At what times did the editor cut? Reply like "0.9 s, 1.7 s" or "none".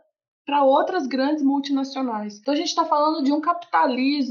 none